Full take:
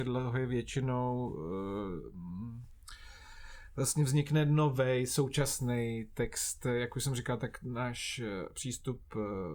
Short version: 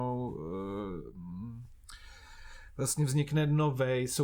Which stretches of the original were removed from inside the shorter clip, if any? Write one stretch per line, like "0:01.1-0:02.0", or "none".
none